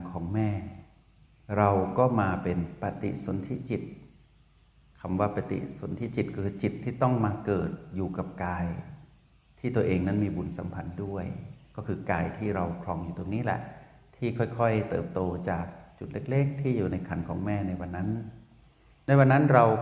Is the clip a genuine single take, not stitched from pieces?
yes; 0 cuts

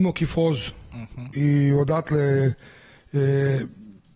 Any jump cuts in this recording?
no; 0 cuts

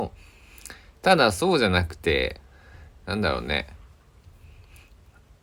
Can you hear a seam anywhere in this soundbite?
no; 0 cuts

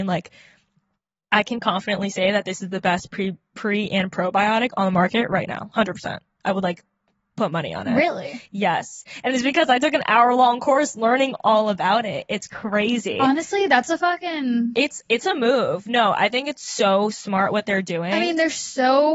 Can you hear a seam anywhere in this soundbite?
no; 0 cuts

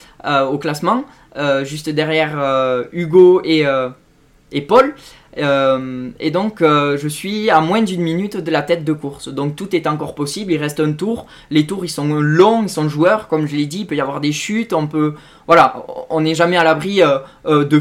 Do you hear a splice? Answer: no; 0 cuts

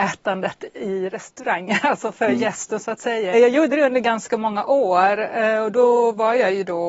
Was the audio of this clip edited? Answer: yes; 1 cut; at 3.3 s

